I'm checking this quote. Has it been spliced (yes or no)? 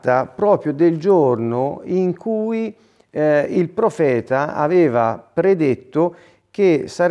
no